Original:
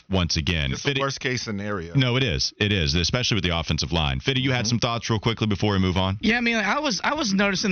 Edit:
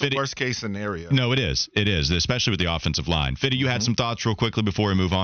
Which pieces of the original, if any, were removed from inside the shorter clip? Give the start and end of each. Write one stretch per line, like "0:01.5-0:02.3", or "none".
none